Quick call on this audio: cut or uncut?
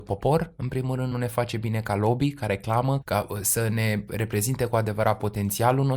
cut